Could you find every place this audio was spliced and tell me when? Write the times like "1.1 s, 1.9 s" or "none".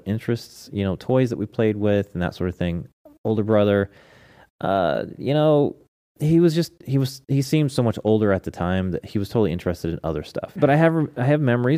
10.6 s